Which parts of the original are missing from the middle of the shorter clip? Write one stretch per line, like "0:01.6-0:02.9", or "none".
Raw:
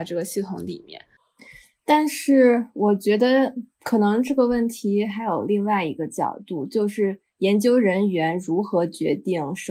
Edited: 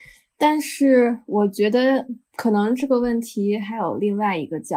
none